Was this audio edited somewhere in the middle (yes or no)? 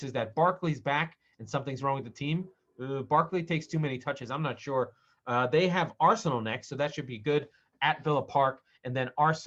no